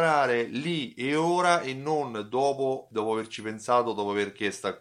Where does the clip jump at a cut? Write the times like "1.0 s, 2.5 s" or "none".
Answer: 2.9 s